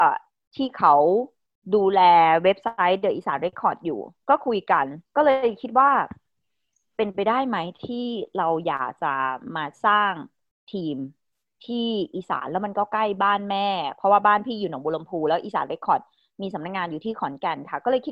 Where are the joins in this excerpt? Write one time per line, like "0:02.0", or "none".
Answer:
0:03.5
0:05.1